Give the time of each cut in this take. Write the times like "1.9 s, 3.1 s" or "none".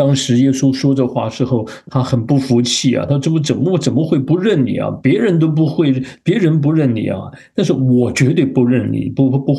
none